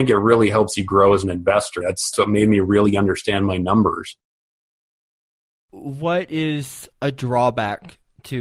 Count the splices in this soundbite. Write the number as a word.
one